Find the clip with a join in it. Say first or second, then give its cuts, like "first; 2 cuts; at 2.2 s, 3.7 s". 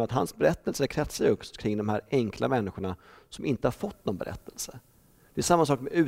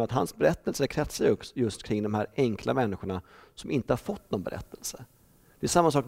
first; 1 cut; at 1.5 s